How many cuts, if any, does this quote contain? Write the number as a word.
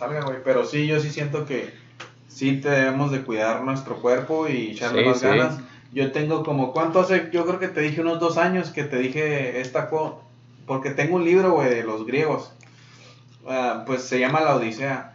zero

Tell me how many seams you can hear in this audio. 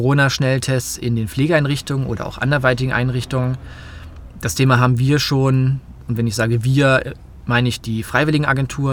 zero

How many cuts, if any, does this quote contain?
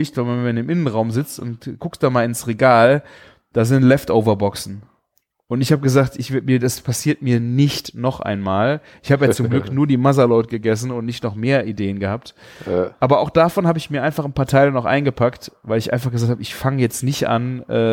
zero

